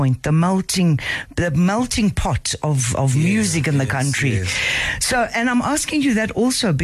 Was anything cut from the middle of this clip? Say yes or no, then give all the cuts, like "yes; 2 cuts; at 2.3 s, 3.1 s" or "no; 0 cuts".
no; 0 cuts